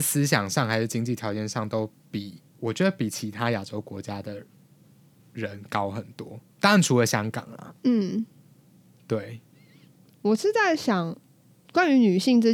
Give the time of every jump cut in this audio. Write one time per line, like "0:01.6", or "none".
0:02.5